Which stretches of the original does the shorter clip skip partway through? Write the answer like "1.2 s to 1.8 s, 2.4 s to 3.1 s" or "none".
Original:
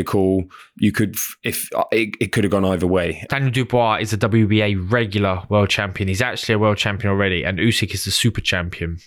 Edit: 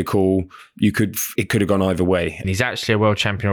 1.4 s to 2.2 s, 3.3 s to 6.0 s